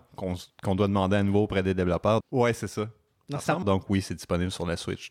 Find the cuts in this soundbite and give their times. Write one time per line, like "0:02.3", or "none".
0:02.2
0:03.6